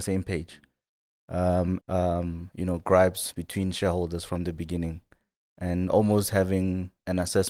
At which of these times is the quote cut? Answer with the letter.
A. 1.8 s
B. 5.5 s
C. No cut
A